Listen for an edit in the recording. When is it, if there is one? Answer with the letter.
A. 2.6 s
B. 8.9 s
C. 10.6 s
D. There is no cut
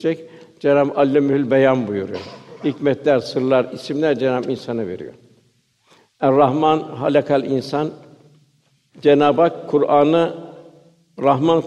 D